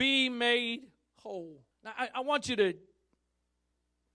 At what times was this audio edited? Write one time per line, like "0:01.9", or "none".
0:01.7